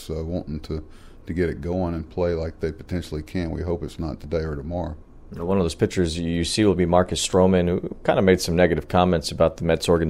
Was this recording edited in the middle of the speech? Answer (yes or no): no